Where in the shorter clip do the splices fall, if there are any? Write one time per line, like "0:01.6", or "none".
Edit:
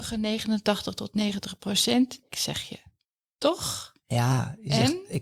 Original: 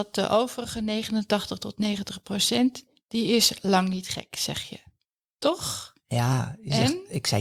0:02.3